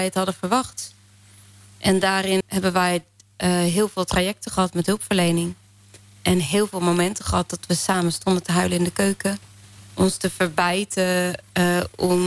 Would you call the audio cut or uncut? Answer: cut